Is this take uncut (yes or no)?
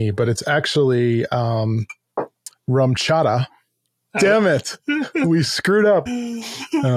no